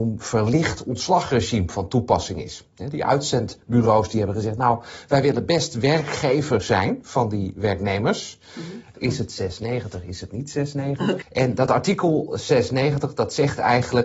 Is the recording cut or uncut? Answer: cut